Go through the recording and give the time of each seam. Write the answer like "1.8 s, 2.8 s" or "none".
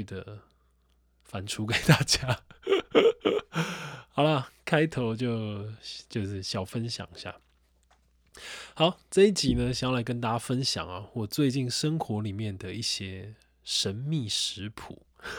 none